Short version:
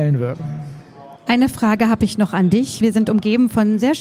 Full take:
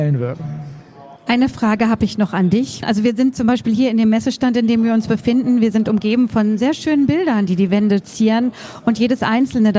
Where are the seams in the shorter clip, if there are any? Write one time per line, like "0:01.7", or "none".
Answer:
0:02.8